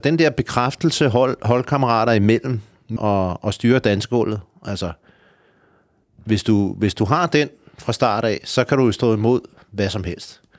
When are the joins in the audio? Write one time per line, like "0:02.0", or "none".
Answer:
0:03.0